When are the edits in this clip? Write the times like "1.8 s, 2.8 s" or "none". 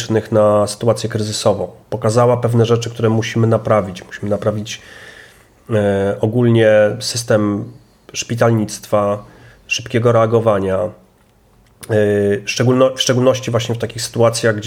none